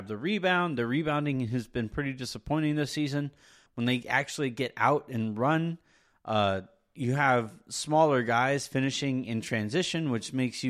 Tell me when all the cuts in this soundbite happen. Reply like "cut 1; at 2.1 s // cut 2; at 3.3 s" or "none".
cut 1; at 3.7 s